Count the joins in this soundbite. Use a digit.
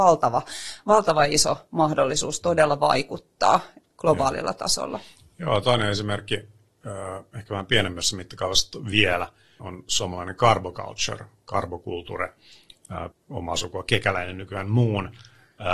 2